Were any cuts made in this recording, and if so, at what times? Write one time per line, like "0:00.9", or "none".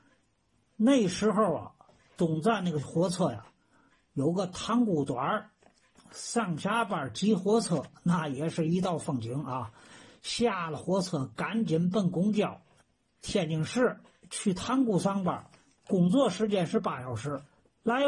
none